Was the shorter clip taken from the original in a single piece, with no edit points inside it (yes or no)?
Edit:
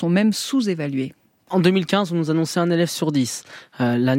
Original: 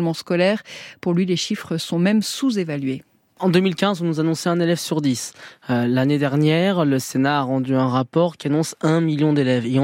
yes